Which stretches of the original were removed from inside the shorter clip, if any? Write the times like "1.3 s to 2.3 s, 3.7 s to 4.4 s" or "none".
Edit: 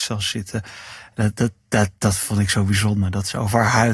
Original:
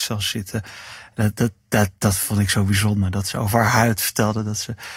none